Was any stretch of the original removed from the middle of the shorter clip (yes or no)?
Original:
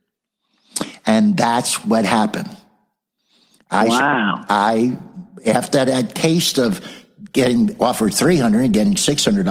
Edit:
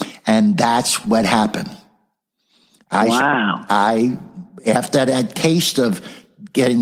no